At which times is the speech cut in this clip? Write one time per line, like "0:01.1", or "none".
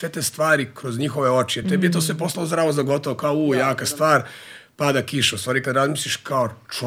none